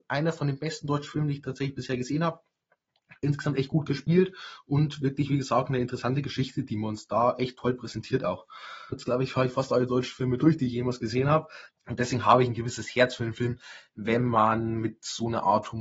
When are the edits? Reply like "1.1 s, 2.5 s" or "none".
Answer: 8.9 s, 11.7 s

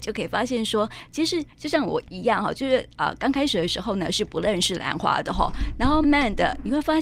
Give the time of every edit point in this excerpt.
6.0 s

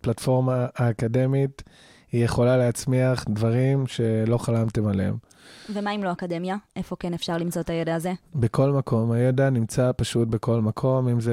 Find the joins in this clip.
none

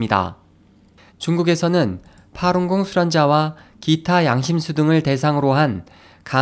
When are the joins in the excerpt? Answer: 1.1 s

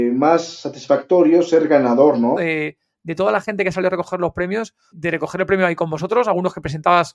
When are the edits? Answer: 2.4 s, 4.9 s

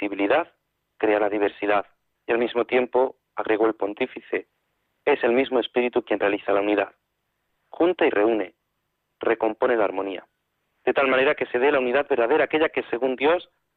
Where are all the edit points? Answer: 2.1 s

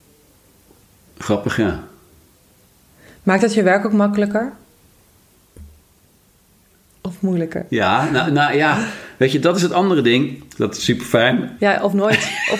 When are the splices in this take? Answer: 10.6 s, 11.6 s

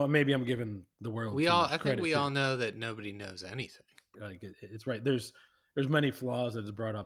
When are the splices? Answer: 4.1 s

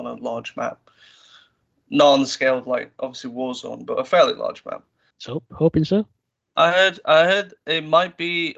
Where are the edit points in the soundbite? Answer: 5.1 s

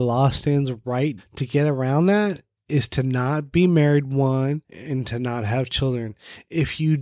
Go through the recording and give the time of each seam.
1.2 s, 4.6 s

